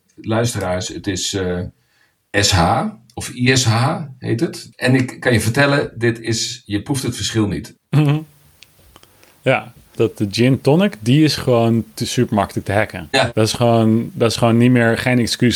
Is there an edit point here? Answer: yes; 3 cuts; at 4.7 s, 7.8 s, 9.9 s

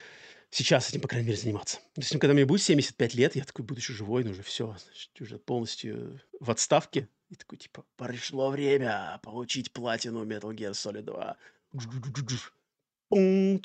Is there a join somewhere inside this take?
yes; 2 cuts; at 1.9 s, 6.3 s

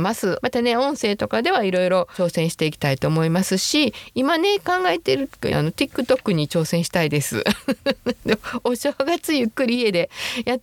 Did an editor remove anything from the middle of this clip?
yes; 1 cut; at 5.5 s

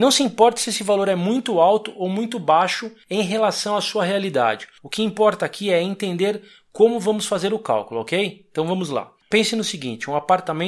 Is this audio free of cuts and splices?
no; 1 cut; at 9.2 s

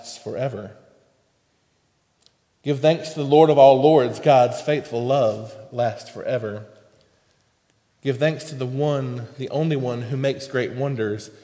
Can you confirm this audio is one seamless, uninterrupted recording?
yes; 0 cuts

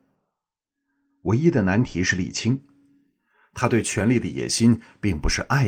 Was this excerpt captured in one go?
yes; 0 cuts

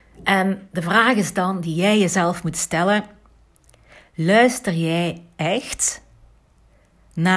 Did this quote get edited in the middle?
no; 0 cuts

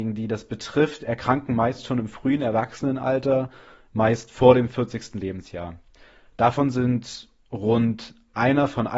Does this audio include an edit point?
no; 0 cuts

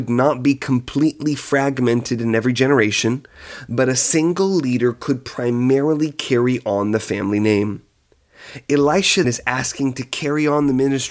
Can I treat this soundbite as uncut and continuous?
no; 1 cut; at 9.2 s

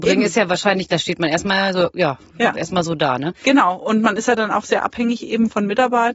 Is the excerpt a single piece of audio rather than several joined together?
yes; 0 cuts

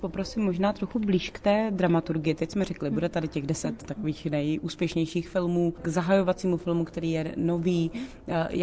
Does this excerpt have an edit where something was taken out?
no; 0 cuts

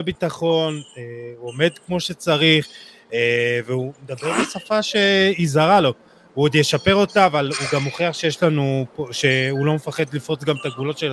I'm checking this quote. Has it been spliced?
no; 0 cuts

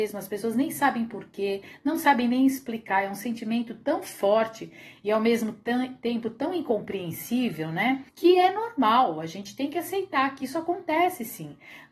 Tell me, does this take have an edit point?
yes; 1 cut; at 8.1 s

